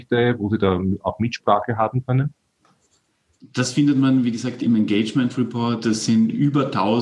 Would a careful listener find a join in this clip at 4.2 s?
no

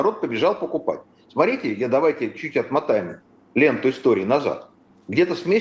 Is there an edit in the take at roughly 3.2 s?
no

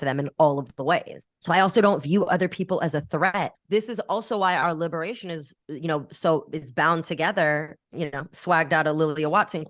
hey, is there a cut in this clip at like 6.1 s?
no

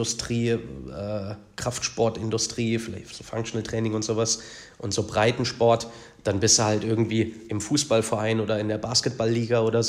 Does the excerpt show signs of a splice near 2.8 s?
no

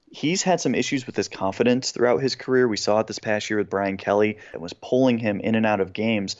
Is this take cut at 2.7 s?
no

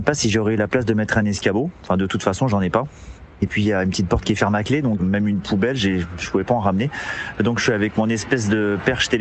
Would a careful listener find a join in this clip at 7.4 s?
no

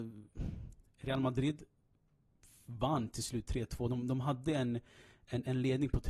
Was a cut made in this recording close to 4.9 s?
no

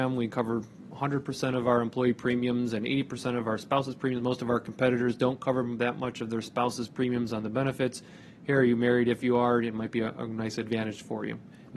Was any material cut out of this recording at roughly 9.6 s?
no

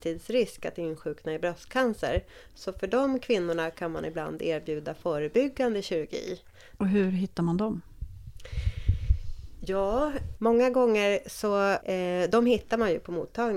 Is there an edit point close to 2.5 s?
no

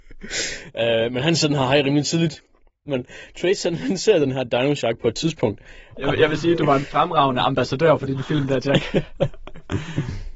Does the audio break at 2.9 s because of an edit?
yes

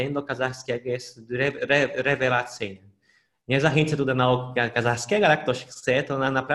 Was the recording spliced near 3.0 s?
no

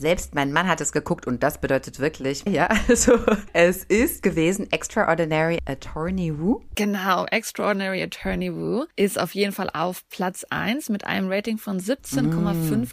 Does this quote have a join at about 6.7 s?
no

